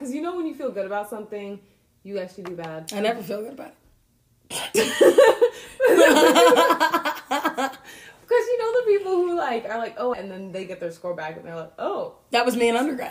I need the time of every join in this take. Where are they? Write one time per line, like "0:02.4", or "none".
0:10.1